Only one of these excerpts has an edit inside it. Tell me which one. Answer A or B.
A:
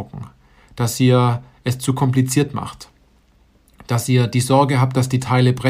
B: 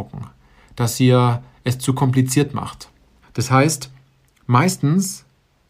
B